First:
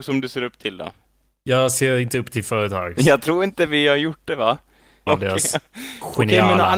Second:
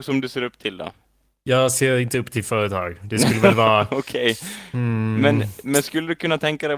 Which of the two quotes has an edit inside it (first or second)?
first